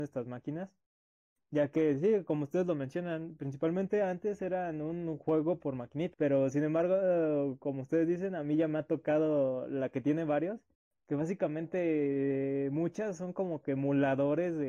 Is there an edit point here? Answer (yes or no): yes